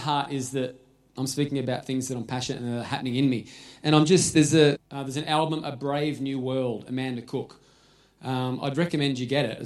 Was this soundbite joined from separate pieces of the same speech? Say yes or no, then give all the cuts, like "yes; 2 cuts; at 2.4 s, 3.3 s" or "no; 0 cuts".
yes; 1 cut; at 4.8 s